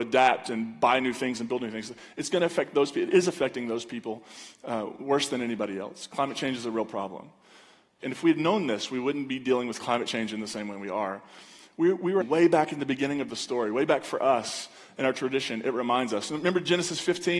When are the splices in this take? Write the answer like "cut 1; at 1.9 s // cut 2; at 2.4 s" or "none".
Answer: cut 1; at 8.0 s // cut 2; at 12.2 s